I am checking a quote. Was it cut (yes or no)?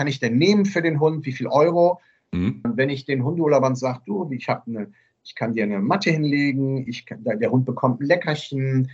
yes